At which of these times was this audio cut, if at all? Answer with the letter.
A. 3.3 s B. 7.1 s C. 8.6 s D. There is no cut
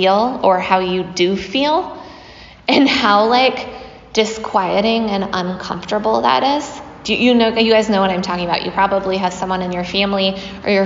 D